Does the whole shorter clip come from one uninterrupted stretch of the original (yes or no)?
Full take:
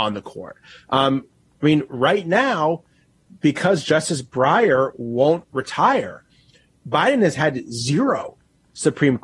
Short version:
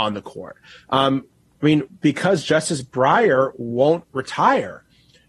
no